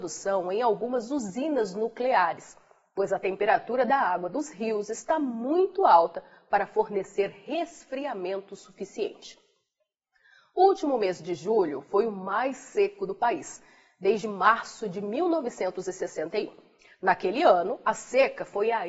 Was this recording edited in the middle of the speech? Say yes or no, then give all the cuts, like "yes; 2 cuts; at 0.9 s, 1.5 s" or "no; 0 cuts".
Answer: no; 0 cuts